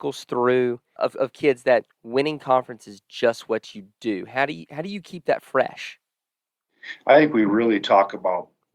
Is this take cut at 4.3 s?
no; 1 cut; at 1.0 s

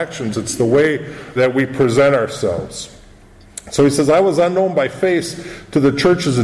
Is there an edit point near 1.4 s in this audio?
yes; 1 cut; at 1.4 s

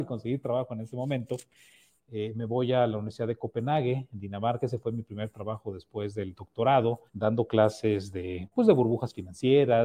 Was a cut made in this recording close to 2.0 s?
yes; 2 cuts; at 2.0 s, 7.1 s

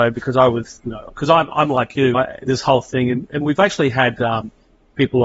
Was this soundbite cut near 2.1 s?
yes; 1 cut; at 2.1 s

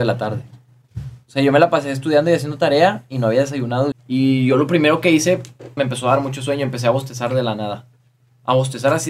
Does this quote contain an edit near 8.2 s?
no; 2 cuts; at 3.9 s, 5.8 s

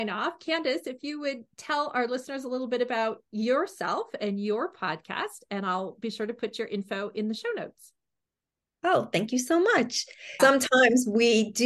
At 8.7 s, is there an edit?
no; 1 cut; at 10.4 s

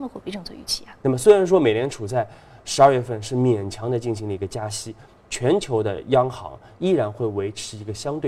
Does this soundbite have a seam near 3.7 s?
no; 2 cuts; at 1.0 s, 5.2 s

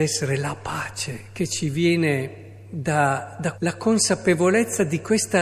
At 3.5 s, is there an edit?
yes; 1 cut; at 3.5 s

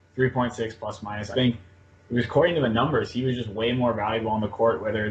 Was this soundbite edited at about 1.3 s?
yes; 1 cut; at 1.3 s

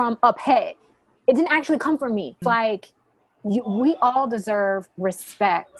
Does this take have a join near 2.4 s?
yes; 1 cut; at 2.4 s

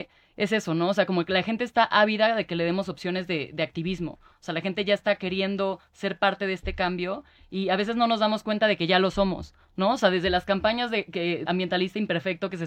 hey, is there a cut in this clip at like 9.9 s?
no; 2 cuts; at 4.3 s, 11.4 s

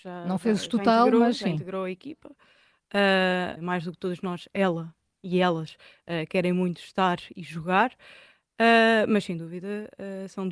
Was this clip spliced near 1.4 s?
no; 1 cut; at 3.6 s

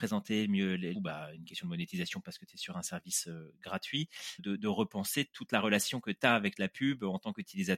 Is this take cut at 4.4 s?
yes; 2 cuts; at 0.9 s, 4.4 s

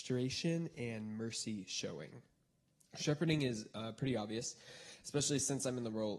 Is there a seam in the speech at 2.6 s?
no; 0 cuts

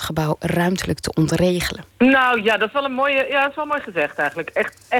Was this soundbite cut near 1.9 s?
yes; 1 cut; at 1.9 s

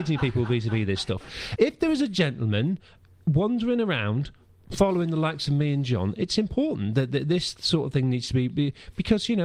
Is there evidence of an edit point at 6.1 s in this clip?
no; 1 cut; at 1.6 s

